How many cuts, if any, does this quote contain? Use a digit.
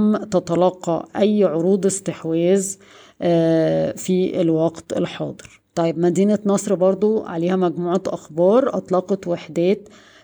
1